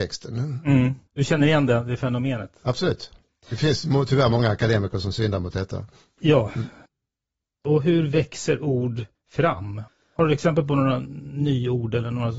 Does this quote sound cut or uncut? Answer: uncut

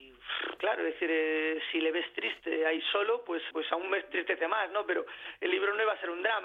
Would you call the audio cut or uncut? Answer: cut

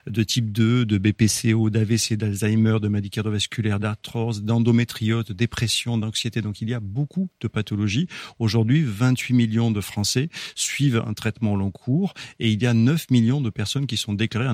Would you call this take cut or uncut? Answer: uncut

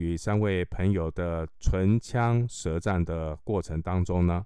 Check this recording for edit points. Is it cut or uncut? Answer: cut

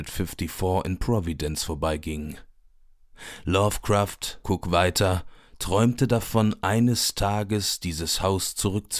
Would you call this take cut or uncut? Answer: cut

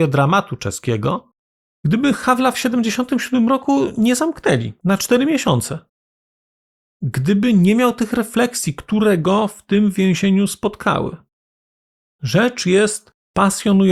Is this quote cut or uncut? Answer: uncut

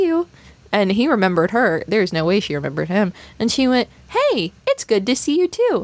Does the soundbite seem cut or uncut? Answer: uncut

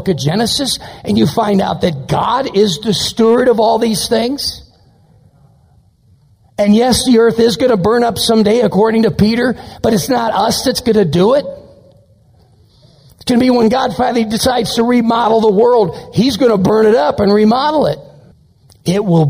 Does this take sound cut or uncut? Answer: uncut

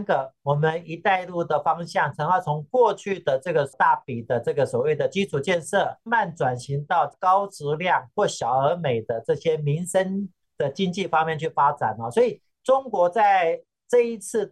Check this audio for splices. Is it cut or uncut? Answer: cut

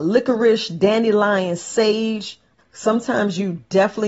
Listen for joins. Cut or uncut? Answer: cut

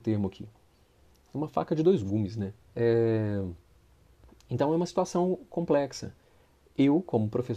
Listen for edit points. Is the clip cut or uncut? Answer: cut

